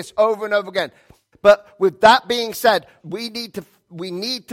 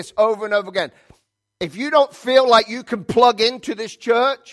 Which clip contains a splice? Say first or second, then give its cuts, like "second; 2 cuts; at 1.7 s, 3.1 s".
first; 2 cuts; at 1.3 s, 3.0 s